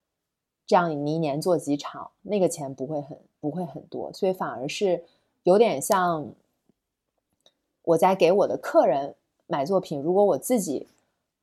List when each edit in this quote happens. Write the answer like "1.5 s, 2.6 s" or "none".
none